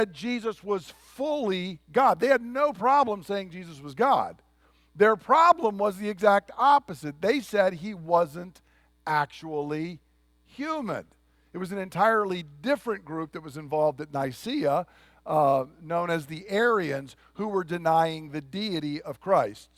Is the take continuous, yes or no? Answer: yes